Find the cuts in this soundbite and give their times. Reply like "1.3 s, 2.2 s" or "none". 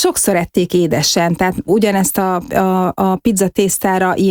none